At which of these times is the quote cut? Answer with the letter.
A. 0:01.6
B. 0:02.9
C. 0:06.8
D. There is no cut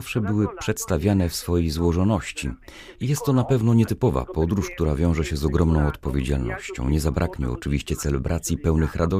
B